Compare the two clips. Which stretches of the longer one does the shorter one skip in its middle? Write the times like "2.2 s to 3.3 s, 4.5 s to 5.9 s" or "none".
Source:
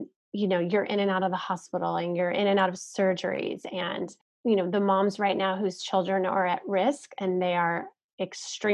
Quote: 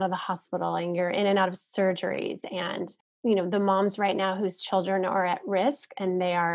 none